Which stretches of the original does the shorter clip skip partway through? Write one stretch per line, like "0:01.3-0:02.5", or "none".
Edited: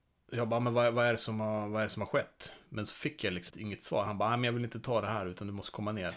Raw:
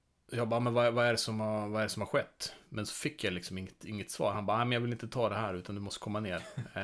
0:03.5-0:03.8